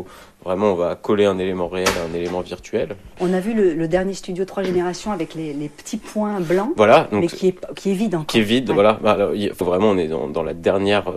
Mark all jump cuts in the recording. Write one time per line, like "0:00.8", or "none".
0:03.1
0:09.6